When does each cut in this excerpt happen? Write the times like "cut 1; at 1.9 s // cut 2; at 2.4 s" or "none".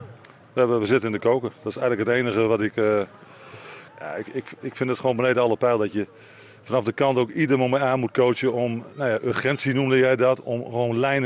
cut 1; at 3.9 s